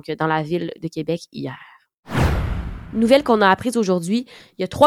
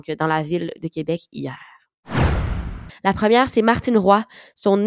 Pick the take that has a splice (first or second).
second